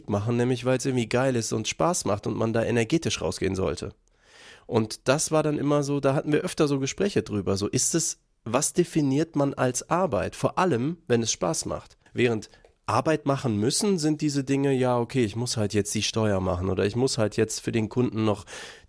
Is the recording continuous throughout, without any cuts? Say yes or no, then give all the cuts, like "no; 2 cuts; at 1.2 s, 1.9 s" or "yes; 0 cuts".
no; 1 cut; at 12.1 s